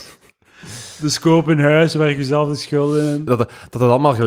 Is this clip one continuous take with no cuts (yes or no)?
no